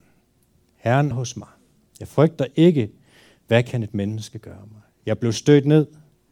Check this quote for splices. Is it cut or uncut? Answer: cut